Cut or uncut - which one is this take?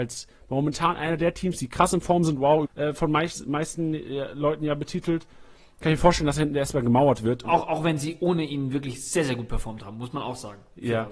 cut